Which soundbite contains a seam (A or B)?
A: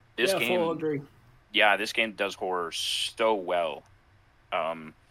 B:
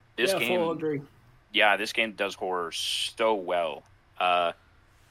B